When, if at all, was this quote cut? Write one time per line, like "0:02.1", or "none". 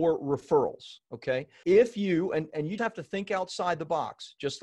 0:01.6
0:02.8